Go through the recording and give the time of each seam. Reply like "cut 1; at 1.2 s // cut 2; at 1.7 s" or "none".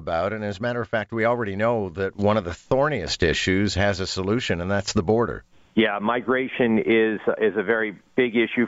none